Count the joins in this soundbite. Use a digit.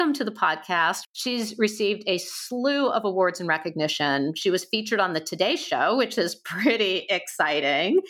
1